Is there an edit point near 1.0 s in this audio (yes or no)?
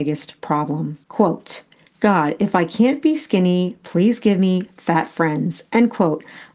yes